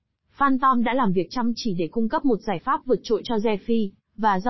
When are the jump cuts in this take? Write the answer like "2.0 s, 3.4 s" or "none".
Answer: none